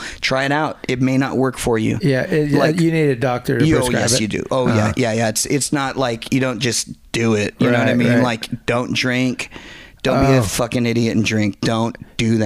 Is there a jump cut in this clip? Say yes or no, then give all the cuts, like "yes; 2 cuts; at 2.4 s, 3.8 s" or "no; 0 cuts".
no; 0 cuts